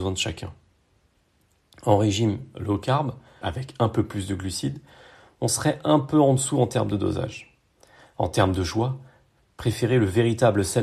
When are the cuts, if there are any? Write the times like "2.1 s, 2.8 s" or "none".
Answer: 3.4 s